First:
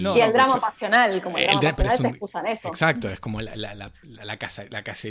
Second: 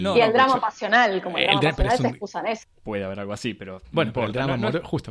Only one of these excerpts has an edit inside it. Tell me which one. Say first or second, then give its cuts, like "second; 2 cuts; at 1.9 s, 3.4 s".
second; 1 cut; at 2.6 s